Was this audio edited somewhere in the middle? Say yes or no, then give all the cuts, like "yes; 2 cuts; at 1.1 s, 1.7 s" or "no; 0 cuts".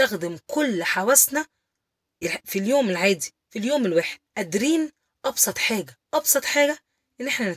yes; 2 cuts; at 2.2 s, 4.3 s